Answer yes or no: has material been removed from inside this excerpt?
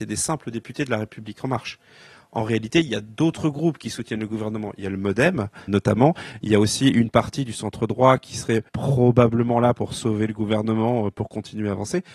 yes